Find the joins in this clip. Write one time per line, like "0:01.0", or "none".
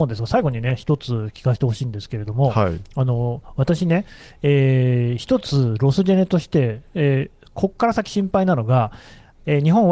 none